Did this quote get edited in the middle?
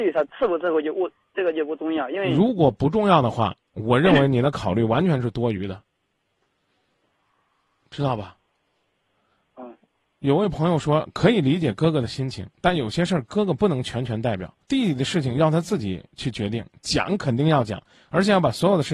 yes; 1 cut; at 14.6 s

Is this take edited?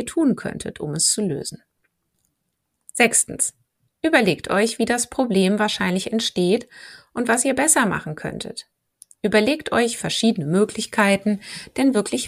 no; 0 cuts

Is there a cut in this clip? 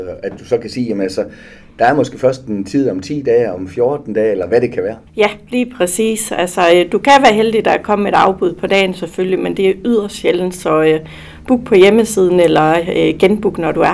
no; 0 cuts

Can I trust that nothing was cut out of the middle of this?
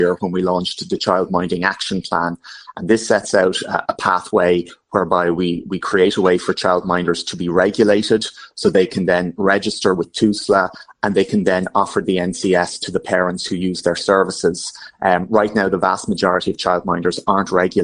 yes; 0 cuts

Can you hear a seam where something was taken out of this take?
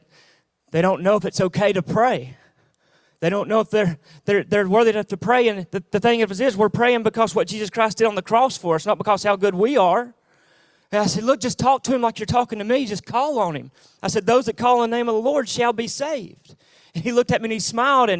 no; 0 cuts

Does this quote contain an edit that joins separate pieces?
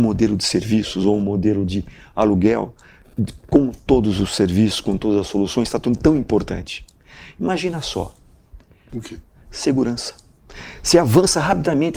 yes; 1 cut; at 8.9 s

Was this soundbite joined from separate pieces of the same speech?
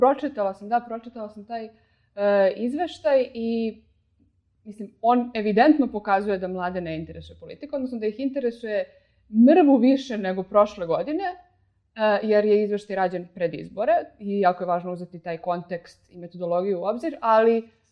no; 0 cuts

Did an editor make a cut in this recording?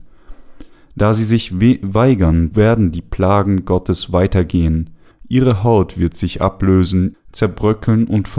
yes; 3 cuts; at 2.5 s, 5.1 s, 7.1 s

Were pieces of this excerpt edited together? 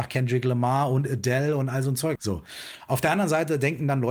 yes; 1 cut; at 2.2 s

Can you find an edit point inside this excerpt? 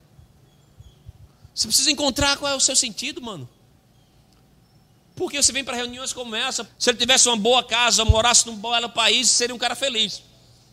yes; 1 cut; at 6.7 s

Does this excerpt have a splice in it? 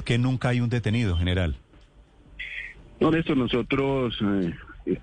no; 0 cuts

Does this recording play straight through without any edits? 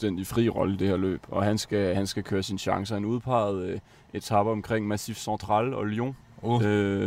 yes; 0 cuts

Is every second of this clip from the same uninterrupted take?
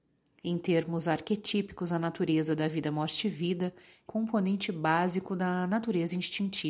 no; 1 cut; at 4.1 s

